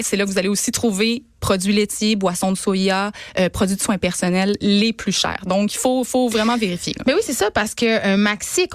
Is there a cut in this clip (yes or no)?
no